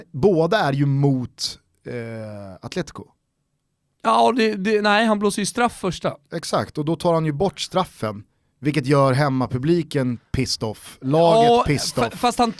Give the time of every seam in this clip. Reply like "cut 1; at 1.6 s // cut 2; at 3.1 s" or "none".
none